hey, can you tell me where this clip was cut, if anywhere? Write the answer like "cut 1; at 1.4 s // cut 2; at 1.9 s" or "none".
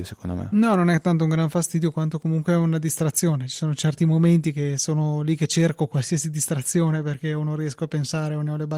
none